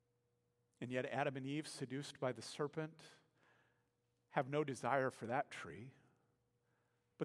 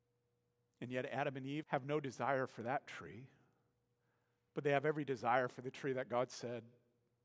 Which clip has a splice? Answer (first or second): second